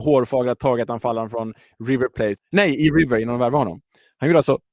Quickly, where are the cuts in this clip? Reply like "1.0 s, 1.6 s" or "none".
2.4 s